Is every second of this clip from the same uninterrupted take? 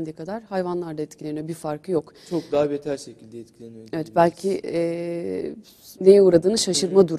no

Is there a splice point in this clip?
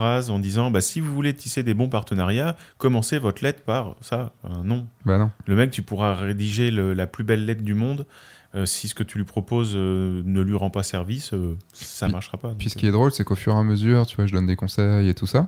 no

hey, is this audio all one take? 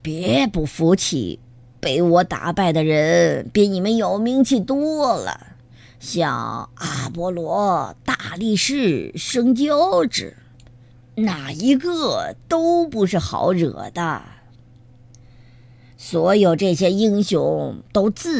yes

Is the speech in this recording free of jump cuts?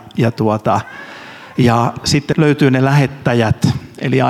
no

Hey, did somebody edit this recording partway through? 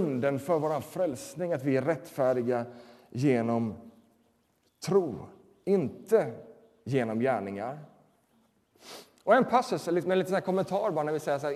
no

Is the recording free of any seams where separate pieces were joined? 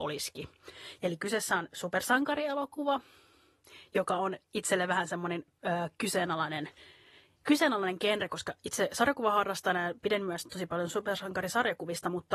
no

